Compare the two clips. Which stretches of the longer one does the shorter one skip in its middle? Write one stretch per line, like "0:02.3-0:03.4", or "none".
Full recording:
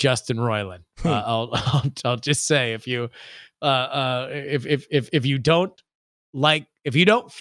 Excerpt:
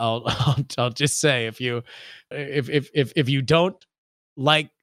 0:03.6-0:04.3